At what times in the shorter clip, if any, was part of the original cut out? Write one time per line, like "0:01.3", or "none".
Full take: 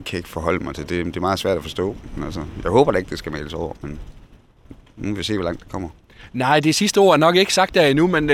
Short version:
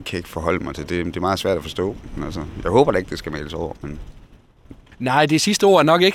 0:04.9